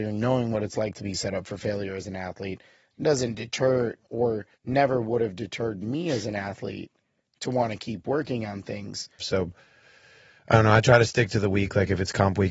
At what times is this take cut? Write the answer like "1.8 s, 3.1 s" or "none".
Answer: 4.5 s, 9.2 s